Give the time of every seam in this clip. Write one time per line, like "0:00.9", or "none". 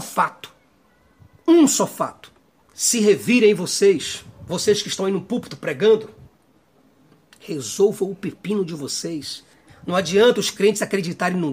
0:02.6
0:09.7